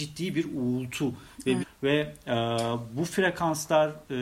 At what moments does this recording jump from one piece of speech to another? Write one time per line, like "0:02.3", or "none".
0:01.6